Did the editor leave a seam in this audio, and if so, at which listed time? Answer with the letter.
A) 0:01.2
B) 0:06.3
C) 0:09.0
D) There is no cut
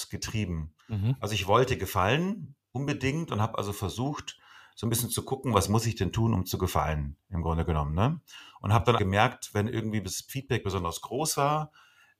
C